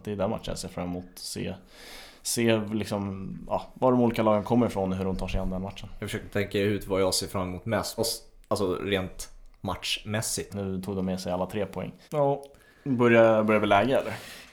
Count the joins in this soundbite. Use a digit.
3